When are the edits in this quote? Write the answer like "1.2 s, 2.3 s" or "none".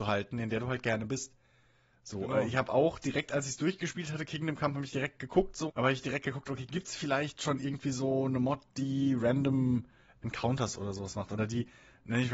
5.7 s

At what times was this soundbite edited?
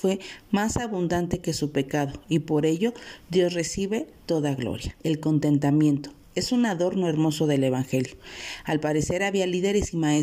5.0 s

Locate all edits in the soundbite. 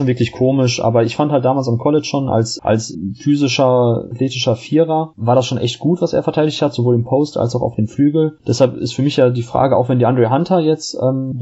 2.6 s, 8.4 s

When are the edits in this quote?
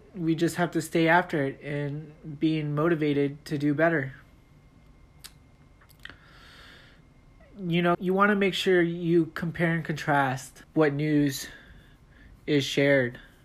7.9 s, 10.6 s

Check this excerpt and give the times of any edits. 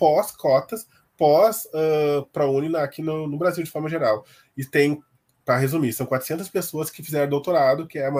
none

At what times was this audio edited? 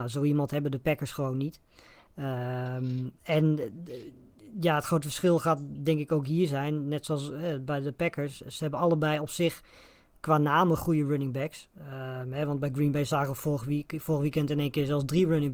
none

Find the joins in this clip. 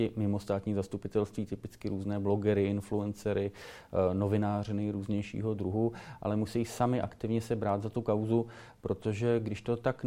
none

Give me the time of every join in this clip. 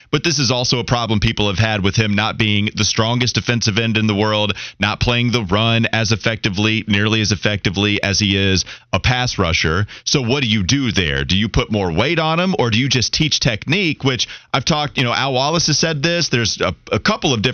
none

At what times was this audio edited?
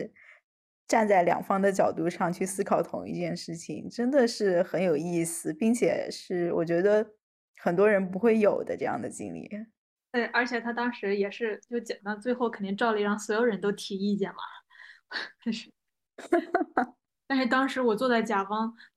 12.0 s, 15.4 s

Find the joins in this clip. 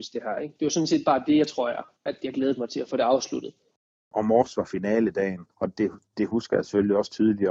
1.9 s, 5.7 s

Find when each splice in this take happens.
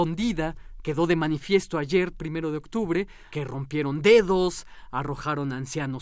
3.3 s

